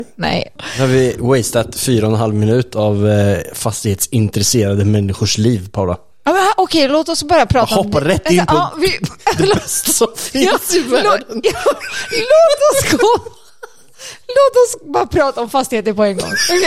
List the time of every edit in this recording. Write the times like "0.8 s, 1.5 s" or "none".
none